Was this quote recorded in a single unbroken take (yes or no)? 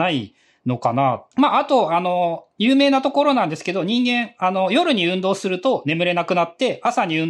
no